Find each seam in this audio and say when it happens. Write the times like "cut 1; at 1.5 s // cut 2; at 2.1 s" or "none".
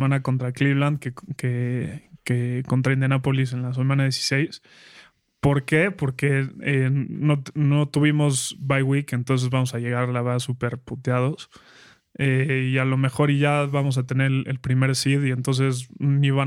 none